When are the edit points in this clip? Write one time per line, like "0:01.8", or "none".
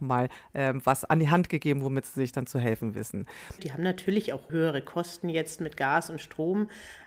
0:03.6